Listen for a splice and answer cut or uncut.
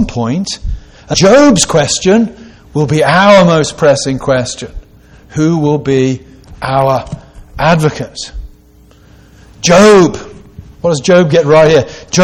cut